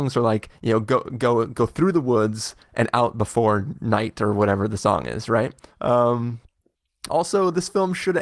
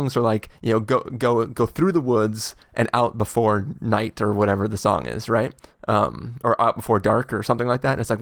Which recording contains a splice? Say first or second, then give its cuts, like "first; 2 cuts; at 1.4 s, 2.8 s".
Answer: first; 2 cuts; at 5.7 s, 7.1 s